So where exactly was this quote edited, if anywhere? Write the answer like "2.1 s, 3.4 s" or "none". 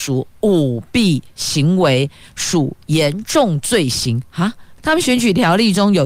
4.8 s